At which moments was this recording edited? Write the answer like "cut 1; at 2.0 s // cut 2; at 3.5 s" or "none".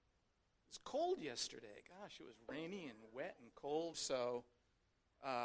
cut 1; at 3.9 s